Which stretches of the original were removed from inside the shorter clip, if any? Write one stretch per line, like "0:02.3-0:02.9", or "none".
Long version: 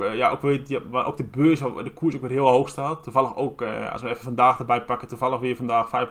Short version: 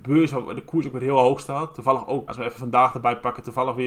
0:03.6-0:03.9